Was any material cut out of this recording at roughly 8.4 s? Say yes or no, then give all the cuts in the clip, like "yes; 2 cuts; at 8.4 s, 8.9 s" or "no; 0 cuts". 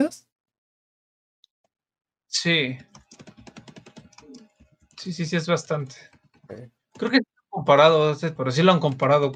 yes; 1 cut; at 8.4 s